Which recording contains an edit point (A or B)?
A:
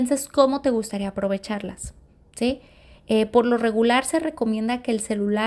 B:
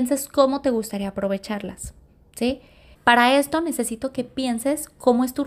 B